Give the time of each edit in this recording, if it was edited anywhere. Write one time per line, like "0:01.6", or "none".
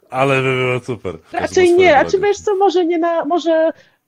0:01.3